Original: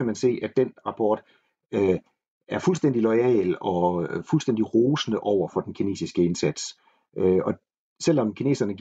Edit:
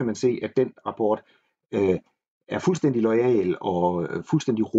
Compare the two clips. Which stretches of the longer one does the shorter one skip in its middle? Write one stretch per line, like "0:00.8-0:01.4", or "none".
none

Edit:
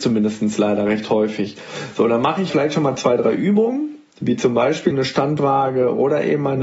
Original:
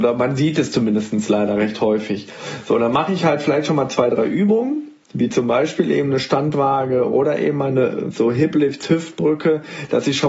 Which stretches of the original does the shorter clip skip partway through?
0:03.2-0:03.4
0:05.8-0:06.1

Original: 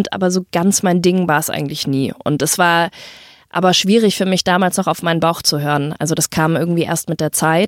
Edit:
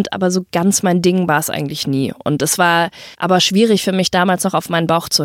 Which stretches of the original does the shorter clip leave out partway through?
0:03.1-0:03.5

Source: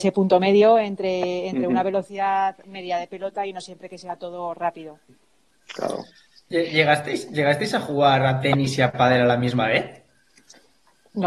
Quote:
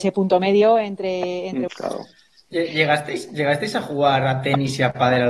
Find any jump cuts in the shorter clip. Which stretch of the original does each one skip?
0:01.7-0:05.7

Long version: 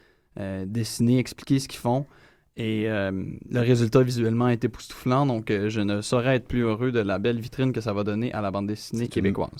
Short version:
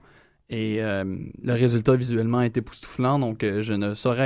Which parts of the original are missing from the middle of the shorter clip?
none

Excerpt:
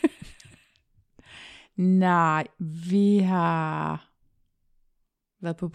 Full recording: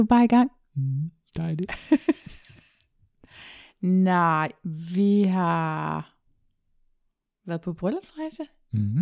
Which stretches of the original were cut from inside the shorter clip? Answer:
none

